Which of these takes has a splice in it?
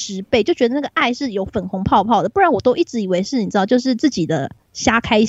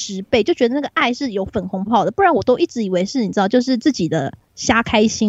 second; 1 cut; at 1.9 s

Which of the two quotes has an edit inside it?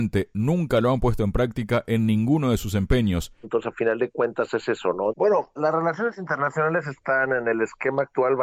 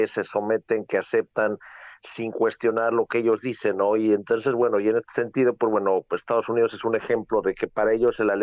first; 2 cuts; at 3.4 s, 5.1 s

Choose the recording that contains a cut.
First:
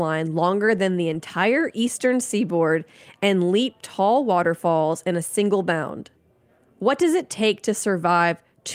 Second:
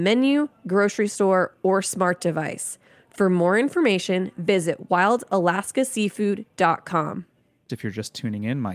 second; 1 cut; at 7.7 s

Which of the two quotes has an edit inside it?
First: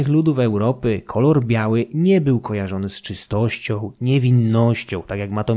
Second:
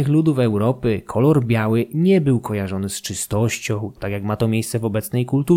second; 1 cut; at 4.0 s

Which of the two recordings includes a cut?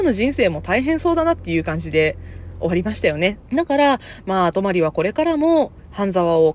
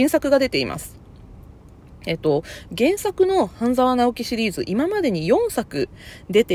first; 1 cut; at 3.4 s

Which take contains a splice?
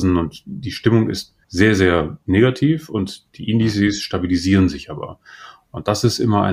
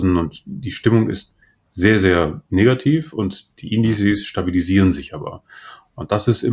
first; 1 cut; at 1.4 s

